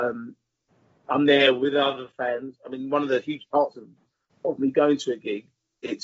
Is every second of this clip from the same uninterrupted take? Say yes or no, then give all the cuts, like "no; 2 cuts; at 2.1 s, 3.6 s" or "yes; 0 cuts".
yes; 0 cuts